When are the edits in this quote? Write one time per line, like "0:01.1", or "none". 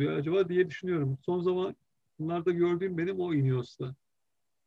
none